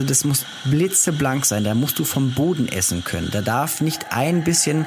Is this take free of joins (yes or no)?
yes